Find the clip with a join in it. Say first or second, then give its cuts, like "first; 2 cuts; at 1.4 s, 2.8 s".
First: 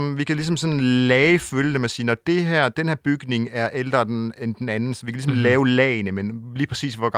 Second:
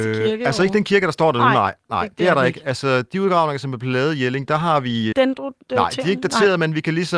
second; 1 cut; at 5.1 s